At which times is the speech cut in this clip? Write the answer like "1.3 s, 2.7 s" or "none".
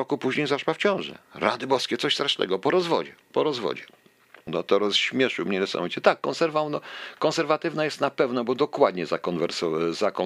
4.5 s